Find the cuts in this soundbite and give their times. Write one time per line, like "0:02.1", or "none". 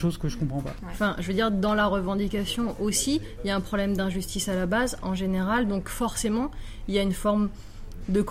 none

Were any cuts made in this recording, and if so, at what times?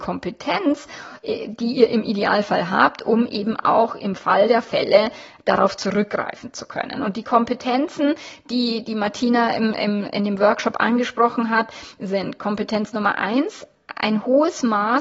none

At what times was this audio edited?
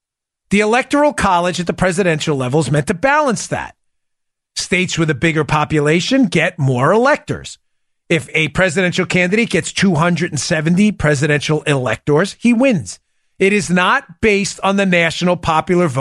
none

